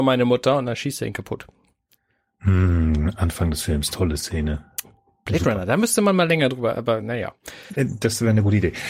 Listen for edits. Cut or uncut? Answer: uncut